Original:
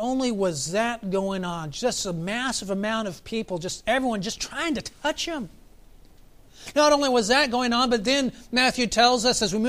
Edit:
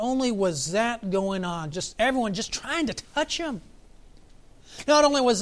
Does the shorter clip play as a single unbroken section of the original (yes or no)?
no